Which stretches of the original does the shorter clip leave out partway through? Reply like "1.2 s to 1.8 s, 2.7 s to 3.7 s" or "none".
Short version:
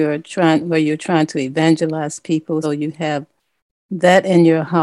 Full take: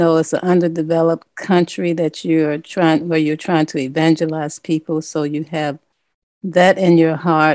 5.0 s to 5.2 s